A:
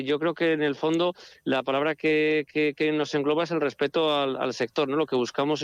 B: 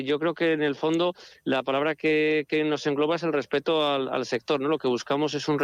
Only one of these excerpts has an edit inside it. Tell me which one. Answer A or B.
B